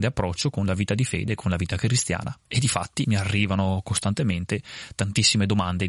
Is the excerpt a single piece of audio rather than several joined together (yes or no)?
no